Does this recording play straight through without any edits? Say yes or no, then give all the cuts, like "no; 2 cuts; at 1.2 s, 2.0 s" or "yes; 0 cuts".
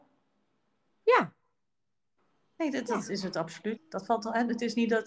no; 1 cut; at 3.8 s